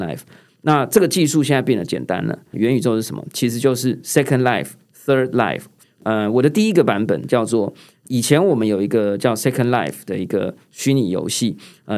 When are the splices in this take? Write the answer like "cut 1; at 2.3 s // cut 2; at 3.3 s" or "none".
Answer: cut 1; at 2.5 s // cut 2; at 5.8 s